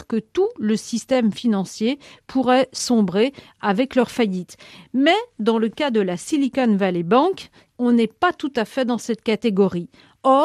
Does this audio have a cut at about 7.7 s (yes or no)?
yes